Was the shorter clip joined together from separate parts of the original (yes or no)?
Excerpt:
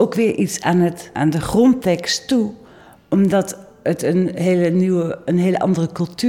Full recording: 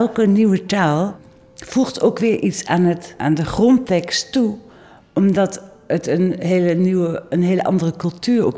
no